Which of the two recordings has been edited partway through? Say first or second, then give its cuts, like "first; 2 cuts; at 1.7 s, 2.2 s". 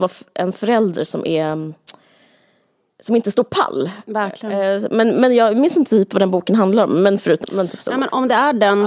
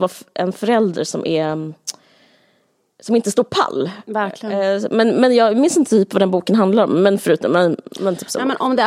first; 1 cut; at 7.4 s